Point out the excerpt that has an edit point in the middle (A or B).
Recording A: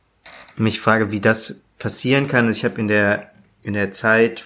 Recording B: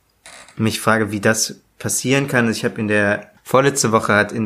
B